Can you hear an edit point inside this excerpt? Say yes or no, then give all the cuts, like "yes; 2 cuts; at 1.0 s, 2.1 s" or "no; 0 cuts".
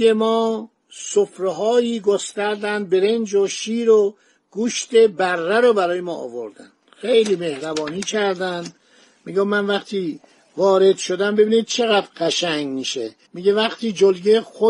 yes; 1 cut; at 13.2 s